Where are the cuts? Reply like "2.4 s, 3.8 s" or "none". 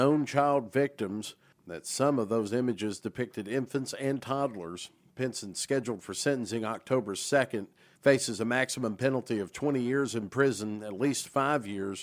none